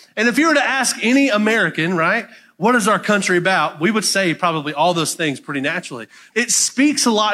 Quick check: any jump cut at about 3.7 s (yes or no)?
no